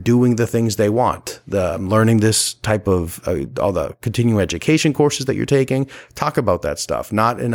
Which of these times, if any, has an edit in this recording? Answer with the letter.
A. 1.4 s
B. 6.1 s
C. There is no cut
C